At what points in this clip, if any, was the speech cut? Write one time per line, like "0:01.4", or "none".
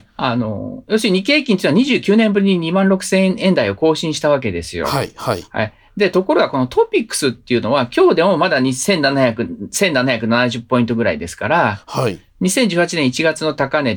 none